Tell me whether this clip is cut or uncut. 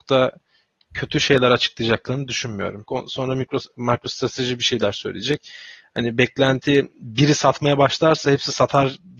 cut